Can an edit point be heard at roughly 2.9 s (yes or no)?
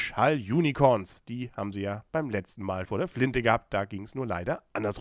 yes